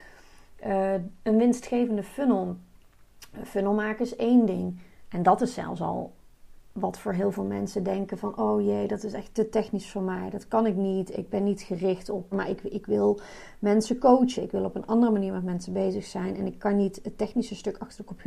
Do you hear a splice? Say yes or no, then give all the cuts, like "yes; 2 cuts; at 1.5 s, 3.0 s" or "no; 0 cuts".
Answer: yes; 2 cuts; at 12.3 s, 14.4 s